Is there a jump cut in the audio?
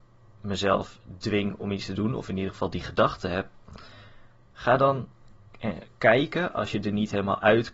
no; 0 cuts

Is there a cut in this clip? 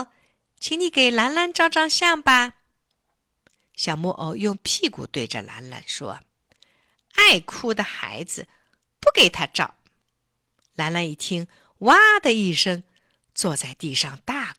no; 0 cuts

